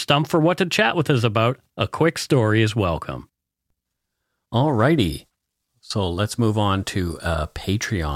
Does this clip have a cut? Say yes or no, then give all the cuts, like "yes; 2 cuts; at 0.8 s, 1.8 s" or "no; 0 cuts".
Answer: no; 0 cuts